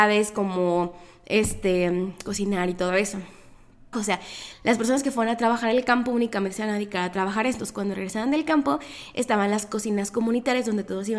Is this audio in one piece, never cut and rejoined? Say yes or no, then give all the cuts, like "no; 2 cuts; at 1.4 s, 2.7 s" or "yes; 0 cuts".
no; 1 cut; at 3.9 s